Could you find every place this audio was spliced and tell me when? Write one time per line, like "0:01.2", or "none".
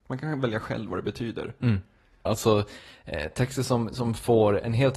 0:02.3